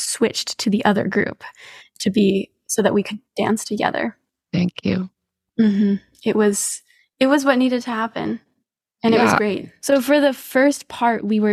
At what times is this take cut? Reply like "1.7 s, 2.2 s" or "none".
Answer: 9.8 s

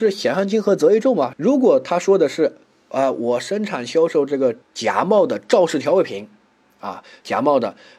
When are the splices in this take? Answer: 1.3 s, 4.6 s

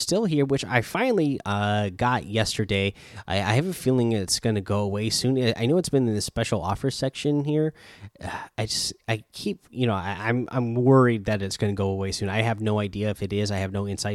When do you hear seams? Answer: none

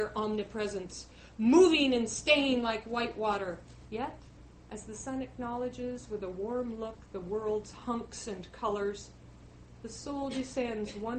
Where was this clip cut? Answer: 3.8 s

